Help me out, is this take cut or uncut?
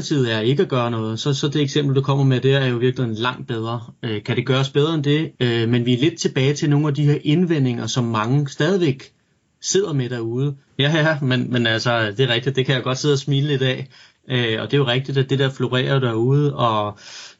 cut